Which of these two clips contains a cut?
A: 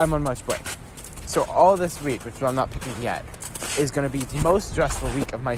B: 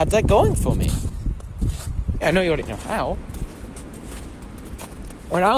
B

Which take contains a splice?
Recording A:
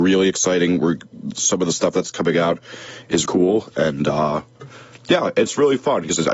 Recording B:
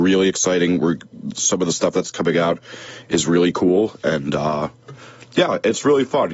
A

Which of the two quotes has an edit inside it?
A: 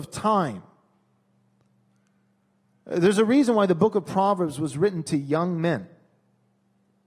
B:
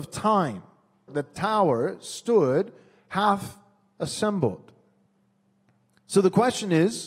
B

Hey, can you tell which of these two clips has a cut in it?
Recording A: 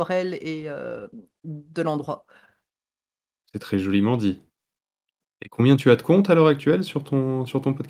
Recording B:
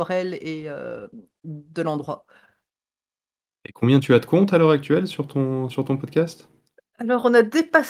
A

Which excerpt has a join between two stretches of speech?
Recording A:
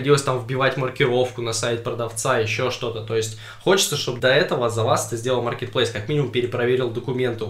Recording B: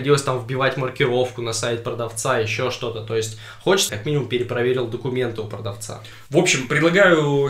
B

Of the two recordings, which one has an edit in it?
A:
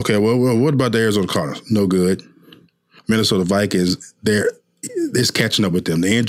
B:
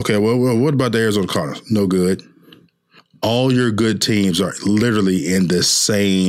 A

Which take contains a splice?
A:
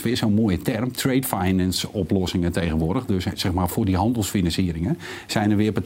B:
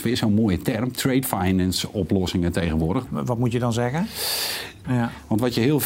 B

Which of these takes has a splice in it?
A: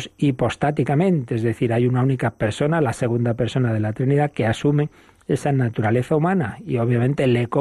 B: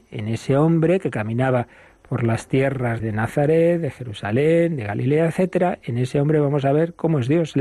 B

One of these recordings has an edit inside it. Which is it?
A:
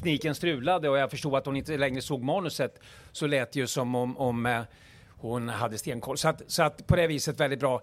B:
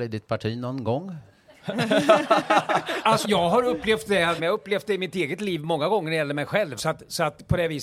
B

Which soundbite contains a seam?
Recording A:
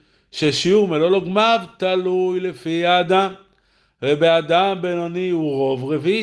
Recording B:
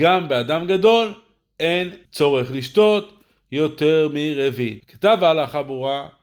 B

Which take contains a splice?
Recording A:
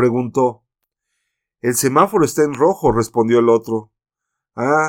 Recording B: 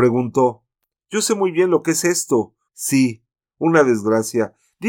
B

